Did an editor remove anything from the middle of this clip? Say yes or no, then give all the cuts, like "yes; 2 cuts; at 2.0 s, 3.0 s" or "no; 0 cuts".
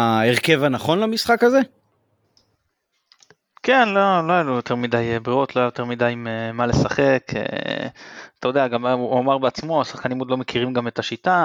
no; 0 cuts